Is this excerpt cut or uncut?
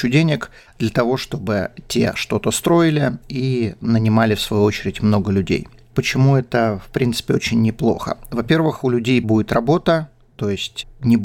uncut